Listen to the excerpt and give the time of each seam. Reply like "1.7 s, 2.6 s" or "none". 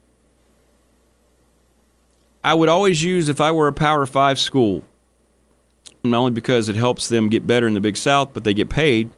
6.0 s

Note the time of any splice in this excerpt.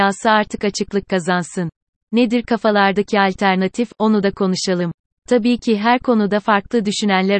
2.0 s

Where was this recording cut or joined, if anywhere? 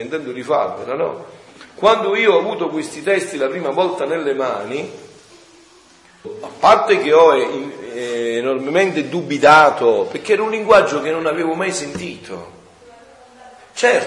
6.2 s

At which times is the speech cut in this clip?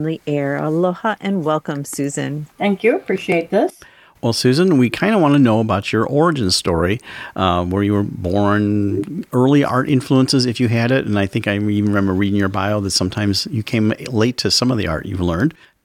none

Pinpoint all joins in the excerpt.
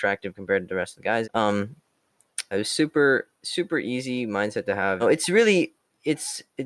1.2 s, 2.5 s, 5.0 s

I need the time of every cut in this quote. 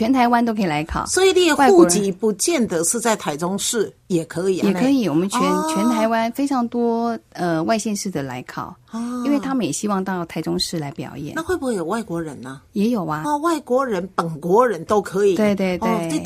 13.2 s

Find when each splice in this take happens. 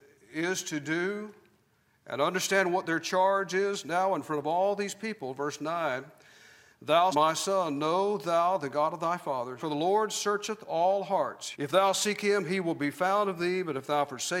7.1 s, 9.6 s, 11.5 s

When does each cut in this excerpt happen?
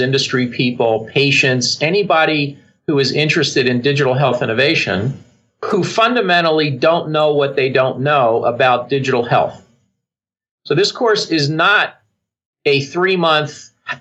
none

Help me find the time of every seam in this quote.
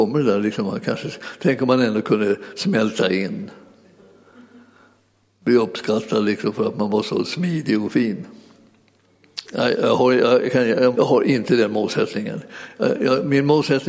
9.4 s, 10.9 s

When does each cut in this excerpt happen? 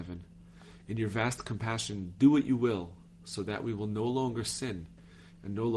none

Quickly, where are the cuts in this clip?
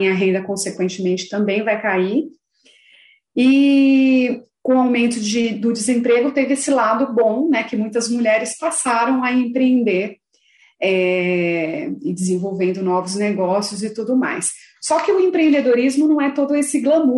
none

